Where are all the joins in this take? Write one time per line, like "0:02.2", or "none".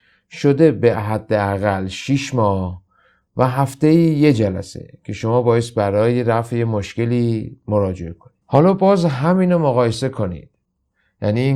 0:08.4